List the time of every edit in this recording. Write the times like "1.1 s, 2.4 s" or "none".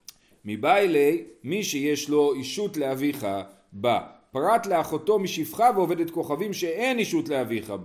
none